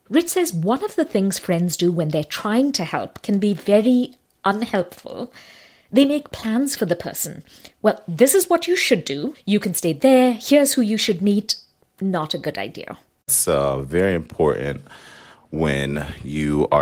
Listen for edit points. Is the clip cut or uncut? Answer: uncut